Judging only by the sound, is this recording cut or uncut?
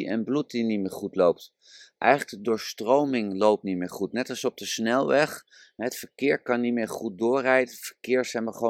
uncut